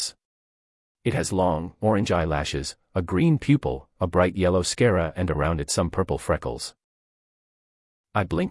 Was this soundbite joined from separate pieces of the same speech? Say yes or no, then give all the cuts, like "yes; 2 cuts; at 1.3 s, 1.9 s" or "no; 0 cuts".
no; 0 cuts